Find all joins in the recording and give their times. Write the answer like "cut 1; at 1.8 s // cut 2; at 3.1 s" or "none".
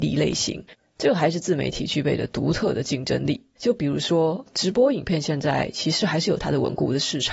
cut 1; at 3.6 s